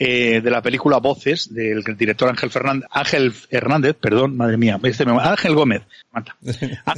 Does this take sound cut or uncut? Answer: cut